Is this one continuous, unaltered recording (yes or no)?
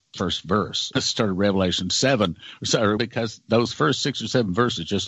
no